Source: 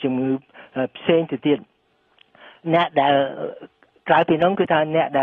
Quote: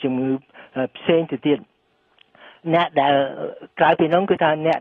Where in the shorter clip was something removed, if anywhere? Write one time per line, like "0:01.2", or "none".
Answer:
0:03.7